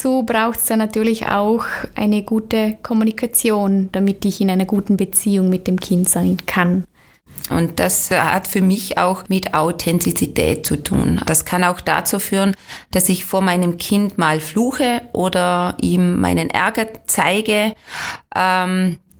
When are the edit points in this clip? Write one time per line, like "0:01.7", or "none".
0:07.5
0:11.2